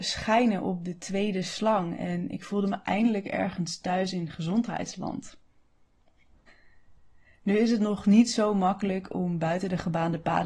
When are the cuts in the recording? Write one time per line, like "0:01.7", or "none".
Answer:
0:06.5